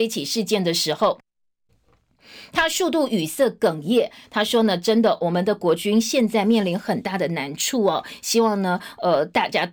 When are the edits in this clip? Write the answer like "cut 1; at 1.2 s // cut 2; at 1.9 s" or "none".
none